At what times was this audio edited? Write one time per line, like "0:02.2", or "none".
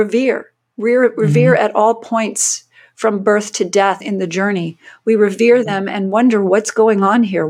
0:04.0